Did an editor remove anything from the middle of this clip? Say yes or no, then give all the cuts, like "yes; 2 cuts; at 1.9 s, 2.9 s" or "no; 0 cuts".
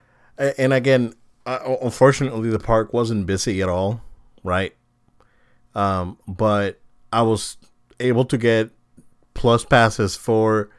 no; 0 cuts